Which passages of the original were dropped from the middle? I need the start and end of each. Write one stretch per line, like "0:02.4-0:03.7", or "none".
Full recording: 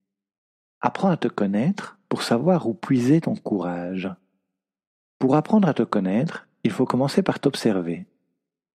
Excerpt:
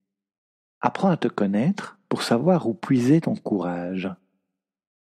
none

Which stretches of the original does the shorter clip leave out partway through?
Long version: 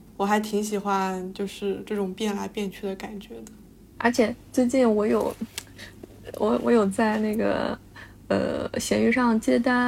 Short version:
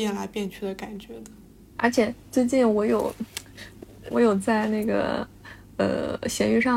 0:06.3-0:06.6

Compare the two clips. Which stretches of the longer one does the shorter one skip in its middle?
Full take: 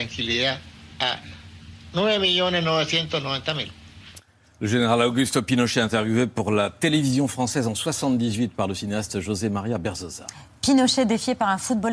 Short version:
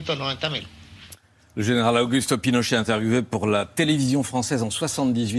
none

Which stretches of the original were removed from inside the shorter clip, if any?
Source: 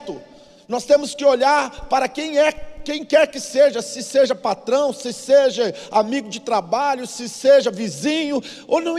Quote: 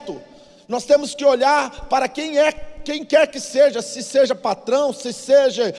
none

